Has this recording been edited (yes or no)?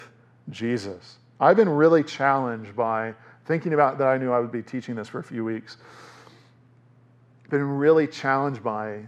no